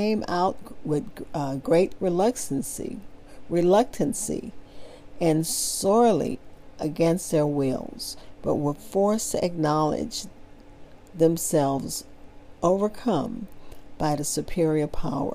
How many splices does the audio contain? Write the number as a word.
zero